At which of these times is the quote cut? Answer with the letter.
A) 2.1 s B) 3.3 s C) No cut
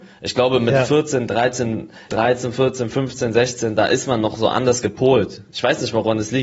A